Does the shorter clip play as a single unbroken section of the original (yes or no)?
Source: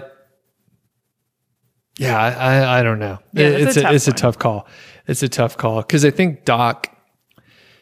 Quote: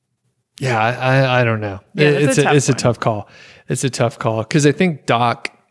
yes